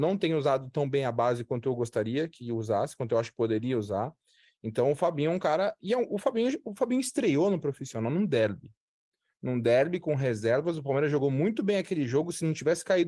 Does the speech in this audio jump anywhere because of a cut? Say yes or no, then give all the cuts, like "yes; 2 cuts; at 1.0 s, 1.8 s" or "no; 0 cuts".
no; 0 cuts